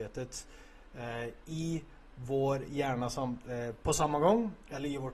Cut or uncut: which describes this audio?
uncut